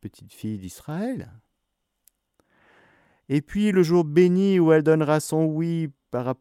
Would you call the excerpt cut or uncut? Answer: uncut